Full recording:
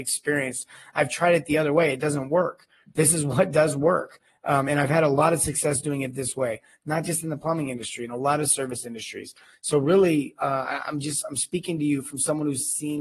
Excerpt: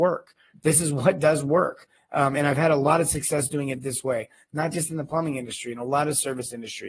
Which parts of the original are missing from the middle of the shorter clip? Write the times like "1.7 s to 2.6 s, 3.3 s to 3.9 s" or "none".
none